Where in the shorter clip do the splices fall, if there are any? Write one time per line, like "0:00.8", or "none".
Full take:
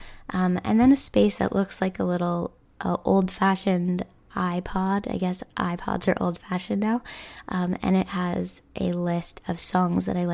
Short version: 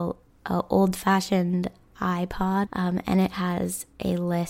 0:02.7